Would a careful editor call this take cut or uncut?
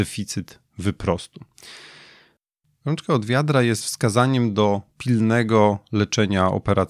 uncut